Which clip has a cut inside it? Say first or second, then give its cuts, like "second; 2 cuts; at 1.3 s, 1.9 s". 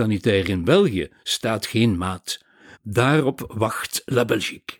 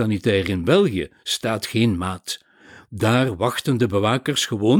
first; 1 cut; at 2.7 s